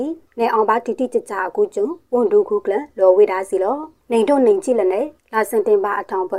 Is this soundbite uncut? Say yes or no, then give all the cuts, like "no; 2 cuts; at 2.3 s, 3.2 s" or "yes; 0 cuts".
yes; 0 cuts